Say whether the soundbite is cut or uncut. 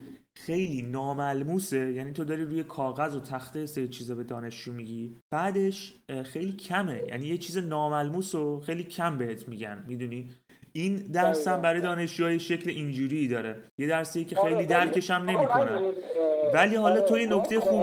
cut